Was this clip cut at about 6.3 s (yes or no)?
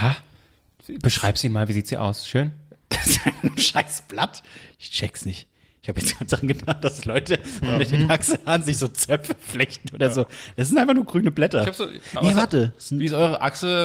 yes